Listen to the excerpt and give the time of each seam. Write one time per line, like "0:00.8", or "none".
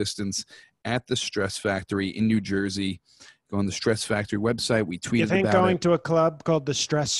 none